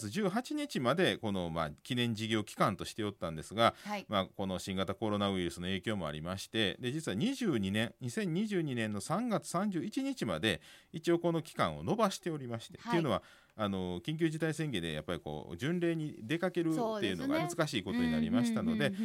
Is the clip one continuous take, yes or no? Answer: no